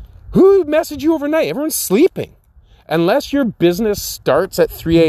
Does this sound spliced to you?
no; 0 cuts

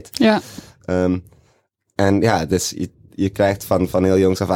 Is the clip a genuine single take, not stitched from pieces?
yes; 0 cuts

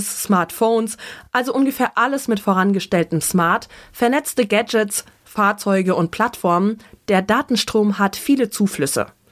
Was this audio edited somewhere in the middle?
no; 0 cuts

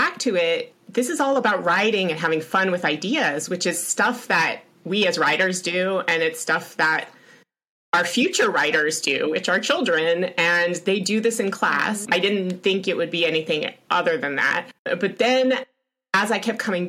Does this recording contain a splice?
yes; 2 cuts; at 12.1 s, 14.8 s

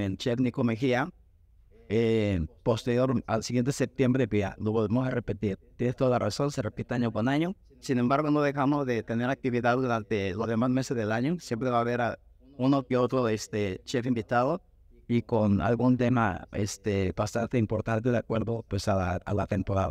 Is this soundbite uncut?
yes; 0 cuts

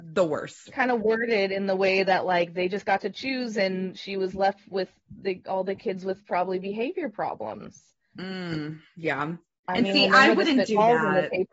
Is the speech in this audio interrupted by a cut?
no; 0 cuts

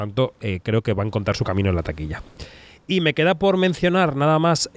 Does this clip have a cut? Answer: no; 0 cuts

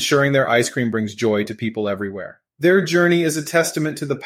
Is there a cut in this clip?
yes; 1 cut; at 2.5 s

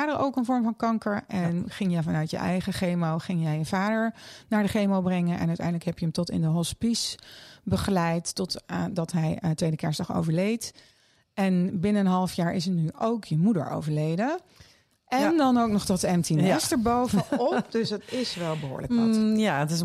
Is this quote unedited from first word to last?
yes; 0 cuts

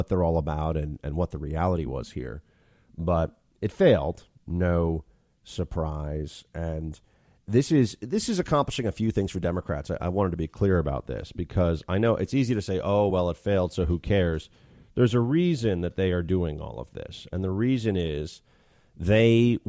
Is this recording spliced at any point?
no; 0 cuts

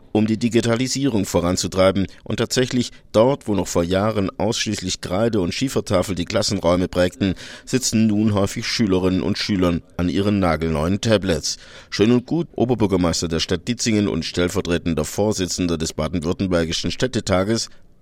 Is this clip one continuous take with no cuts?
no; 1 cut; at 12.5 s

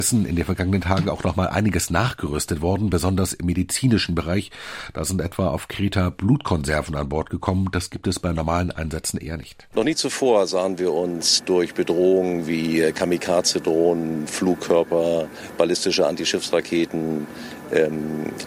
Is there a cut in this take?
yes; 1 cut; at 9.7 s

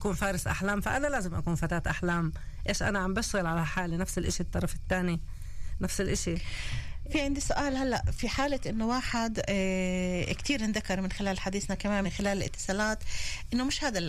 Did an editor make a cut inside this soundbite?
yes; 1 cut; at 12.0 s

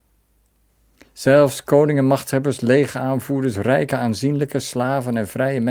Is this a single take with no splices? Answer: yes; 0 cuts

